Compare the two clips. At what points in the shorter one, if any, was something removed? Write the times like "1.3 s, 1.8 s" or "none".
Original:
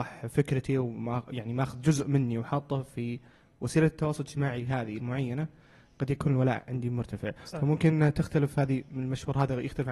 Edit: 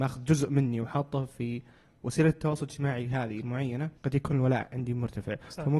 4.0 s